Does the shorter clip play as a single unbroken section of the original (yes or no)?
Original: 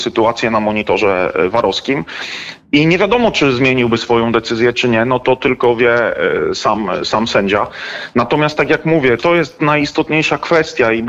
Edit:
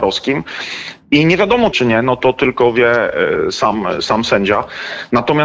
no